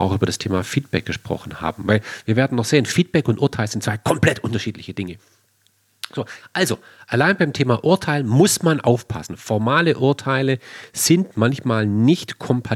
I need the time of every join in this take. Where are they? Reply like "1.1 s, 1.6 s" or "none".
none